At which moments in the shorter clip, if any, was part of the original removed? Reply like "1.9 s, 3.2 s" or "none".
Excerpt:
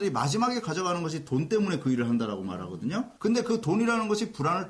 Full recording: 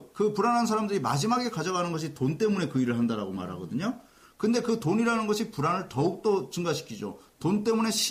3.2 s